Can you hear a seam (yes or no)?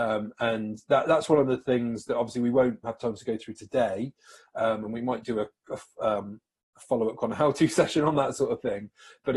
yes